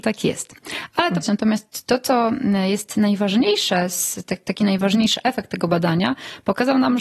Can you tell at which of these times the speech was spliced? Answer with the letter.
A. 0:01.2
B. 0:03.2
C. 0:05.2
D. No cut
A